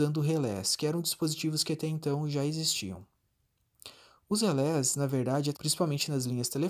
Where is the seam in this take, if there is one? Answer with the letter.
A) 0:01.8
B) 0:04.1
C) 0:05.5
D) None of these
C